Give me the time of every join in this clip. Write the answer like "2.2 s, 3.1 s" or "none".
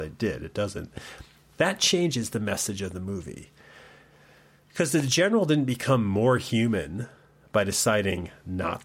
none